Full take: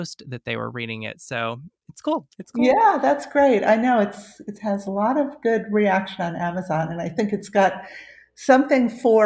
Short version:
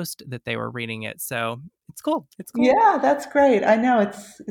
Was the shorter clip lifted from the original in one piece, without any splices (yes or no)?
yes